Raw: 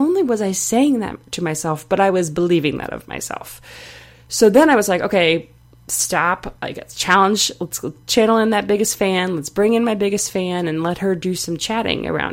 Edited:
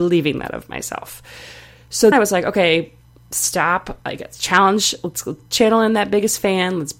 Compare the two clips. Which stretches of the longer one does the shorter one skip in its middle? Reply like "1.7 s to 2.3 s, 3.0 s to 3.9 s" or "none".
4.5 s to 4.7 s